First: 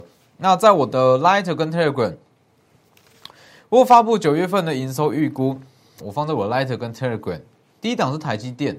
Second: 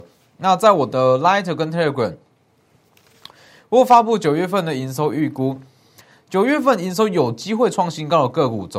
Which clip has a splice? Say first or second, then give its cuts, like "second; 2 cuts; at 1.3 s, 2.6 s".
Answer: first; 1 cut; at 6.0 s